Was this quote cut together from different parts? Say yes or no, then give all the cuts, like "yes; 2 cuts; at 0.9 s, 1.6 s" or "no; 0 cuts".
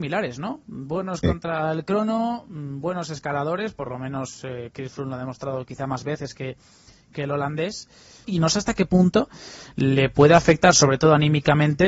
yes; 1 cut; at 8.2 s